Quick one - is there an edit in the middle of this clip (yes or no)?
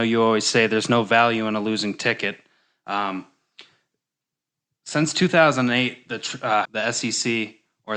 yes